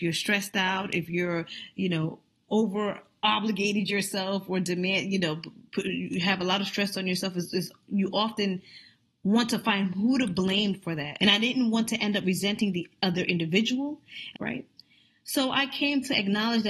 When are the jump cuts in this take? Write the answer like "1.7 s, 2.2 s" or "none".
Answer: 11.2 s, 14.3 s